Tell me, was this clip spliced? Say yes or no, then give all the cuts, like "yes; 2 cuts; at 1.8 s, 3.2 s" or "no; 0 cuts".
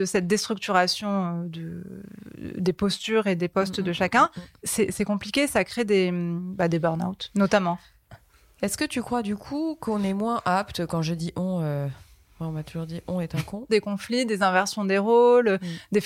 yes; 1 cut; at 13.7 s